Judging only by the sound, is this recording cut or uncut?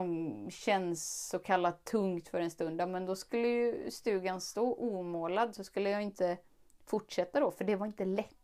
uncut